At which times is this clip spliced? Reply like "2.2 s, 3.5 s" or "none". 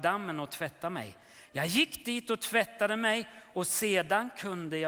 none